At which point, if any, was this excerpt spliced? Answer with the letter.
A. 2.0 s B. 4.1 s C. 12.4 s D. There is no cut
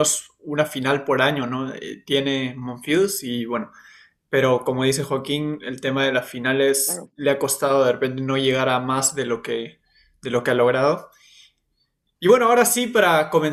D